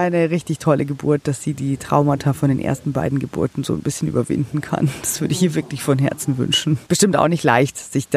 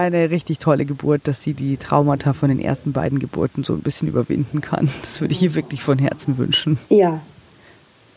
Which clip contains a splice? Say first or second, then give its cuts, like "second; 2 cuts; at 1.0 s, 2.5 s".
first; 1 cut; at 6.9 s